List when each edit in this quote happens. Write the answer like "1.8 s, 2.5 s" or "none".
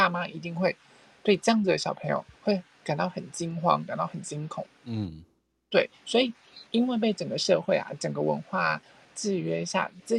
4.7 s, 6.7 s